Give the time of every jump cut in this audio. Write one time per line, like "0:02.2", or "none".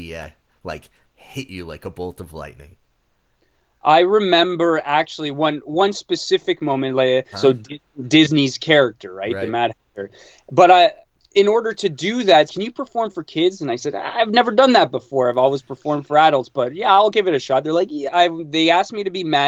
0:07.3
0:12.5
0:18.1